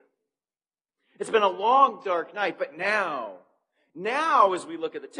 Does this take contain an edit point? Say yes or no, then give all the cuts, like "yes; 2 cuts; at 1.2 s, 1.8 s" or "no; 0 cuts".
no; 0 cuts